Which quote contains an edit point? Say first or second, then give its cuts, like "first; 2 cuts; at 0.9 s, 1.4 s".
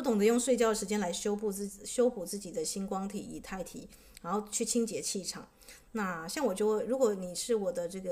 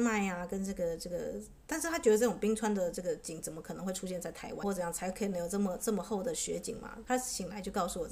second; 2 cuts; at 4.6 s, 7.1 s